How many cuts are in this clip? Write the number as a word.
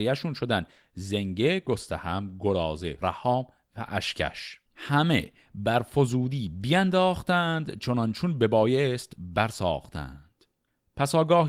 two